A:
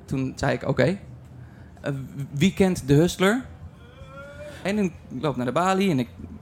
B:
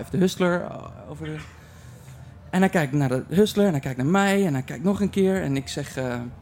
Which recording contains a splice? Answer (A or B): A